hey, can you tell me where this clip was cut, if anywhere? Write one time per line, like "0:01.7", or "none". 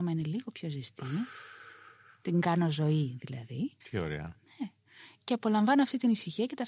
0:03.8